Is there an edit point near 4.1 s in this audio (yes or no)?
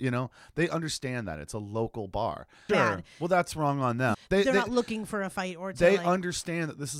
yes